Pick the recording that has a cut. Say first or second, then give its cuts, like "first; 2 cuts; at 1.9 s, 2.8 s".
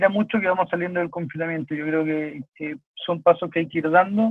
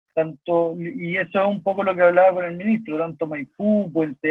first; 1 cut; at 2.4 s